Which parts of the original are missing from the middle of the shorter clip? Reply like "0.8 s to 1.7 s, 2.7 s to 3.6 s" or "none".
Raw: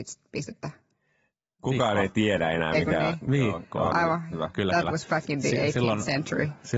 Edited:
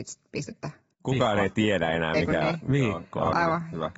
0.9 s to 1.5 s